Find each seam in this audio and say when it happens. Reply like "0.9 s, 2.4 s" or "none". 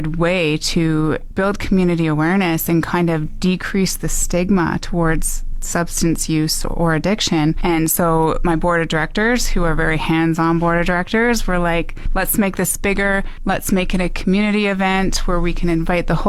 none